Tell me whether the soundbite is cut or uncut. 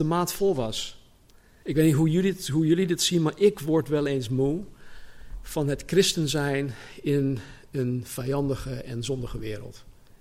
cut